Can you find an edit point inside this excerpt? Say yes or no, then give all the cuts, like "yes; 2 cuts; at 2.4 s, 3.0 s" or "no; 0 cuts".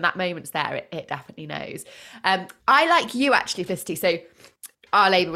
yes; 1 cut; at 2.6 s